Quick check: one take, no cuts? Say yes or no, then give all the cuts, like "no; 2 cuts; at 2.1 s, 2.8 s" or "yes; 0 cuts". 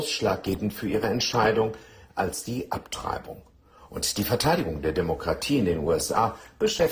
yes; 0 cuts